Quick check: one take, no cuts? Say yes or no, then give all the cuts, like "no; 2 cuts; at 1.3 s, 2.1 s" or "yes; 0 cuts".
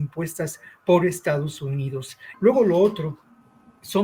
no; 1 cut; at 2.3 s